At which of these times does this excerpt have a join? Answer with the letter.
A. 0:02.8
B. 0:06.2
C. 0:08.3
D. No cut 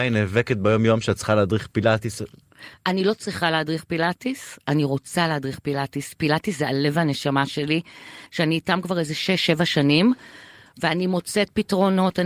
C